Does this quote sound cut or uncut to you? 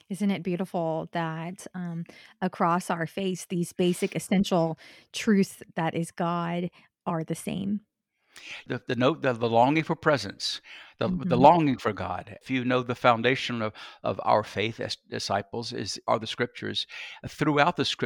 uncut